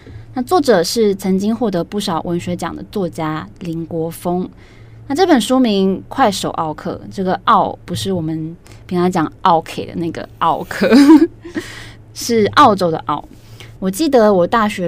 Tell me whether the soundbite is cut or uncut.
cut